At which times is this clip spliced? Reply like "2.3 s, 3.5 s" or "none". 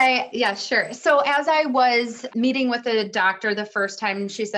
2.3 s